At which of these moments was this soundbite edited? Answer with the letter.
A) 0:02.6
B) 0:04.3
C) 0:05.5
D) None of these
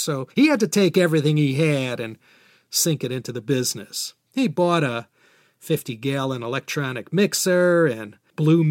B